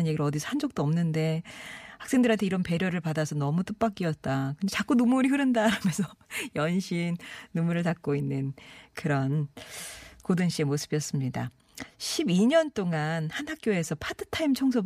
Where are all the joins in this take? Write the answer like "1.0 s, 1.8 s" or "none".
none